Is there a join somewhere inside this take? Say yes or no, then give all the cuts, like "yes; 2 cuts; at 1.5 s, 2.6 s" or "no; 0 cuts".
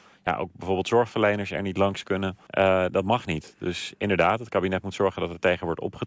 yes; 1 cut; at 2.5 s